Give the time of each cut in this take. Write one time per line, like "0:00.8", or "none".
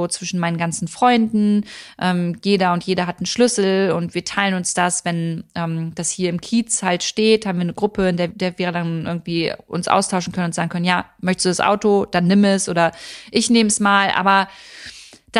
none